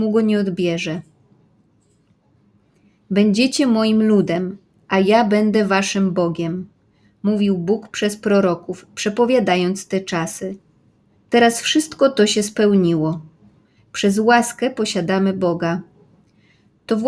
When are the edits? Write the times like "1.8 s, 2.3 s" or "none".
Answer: 11.1 s, 13.8 s